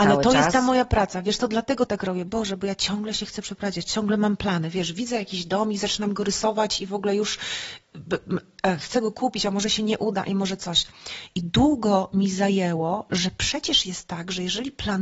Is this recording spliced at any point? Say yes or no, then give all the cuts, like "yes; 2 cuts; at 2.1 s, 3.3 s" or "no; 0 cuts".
yes; 1 cut; at 2.3 s